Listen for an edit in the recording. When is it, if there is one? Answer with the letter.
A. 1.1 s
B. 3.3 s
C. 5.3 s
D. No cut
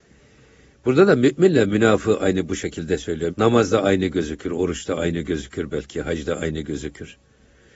B